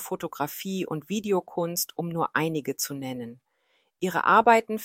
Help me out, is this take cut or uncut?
uncut